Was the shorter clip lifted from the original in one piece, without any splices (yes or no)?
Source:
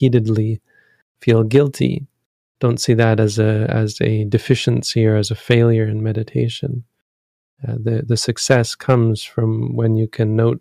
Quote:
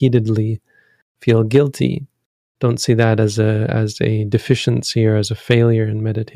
yes